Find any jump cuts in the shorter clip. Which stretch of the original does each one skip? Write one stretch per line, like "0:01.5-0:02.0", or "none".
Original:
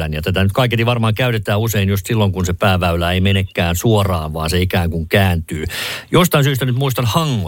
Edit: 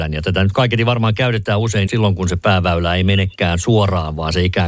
0:01.9-0:02.0